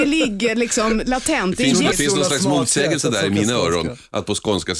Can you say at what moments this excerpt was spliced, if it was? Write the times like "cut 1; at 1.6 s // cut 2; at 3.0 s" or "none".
cut 1; at 1.9 s